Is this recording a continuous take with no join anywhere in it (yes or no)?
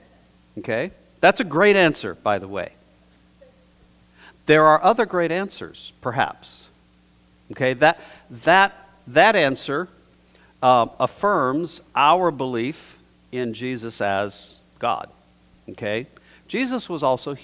yes